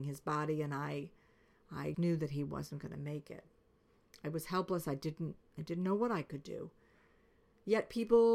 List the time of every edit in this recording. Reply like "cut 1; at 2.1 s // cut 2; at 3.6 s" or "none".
cut 1; at 1.9 s